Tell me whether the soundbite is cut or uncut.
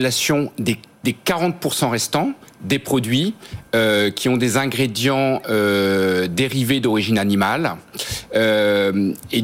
uncut